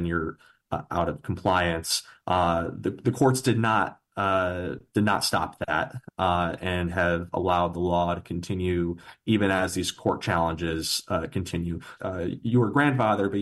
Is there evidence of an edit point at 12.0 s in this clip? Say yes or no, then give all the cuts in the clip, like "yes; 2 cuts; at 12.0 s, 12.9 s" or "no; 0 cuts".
yes; 1 cut; at 12.0 s